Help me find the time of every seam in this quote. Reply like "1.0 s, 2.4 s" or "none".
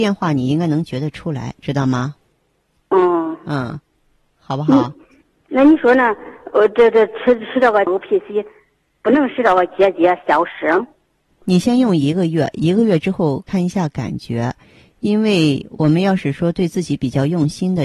11.3 s